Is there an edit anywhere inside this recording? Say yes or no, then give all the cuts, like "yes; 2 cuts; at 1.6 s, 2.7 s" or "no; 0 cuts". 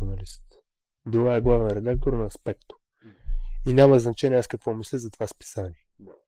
no; 0 cuts